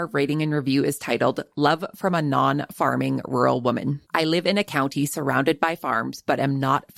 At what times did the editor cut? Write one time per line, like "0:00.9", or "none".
0:04.1